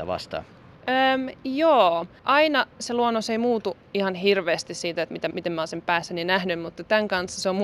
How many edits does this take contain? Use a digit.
1